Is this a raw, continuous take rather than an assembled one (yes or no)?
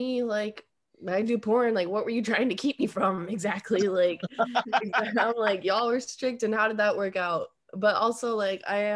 yes